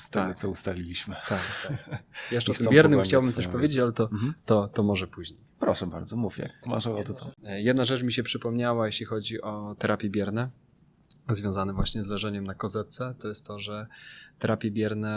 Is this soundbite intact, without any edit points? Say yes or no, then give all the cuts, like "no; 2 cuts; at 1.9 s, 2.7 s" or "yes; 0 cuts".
no; 1 cut; at 13.2 s